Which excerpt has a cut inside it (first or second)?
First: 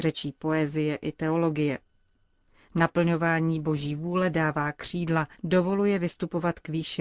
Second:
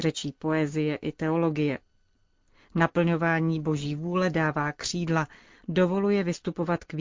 first